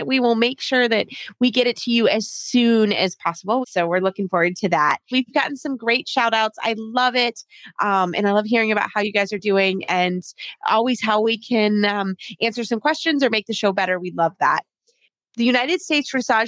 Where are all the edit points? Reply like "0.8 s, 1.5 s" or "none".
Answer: 3.6 s, 5.1 s